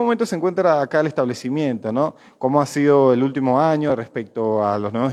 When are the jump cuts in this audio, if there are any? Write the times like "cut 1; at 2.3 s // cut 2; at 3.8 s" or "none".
none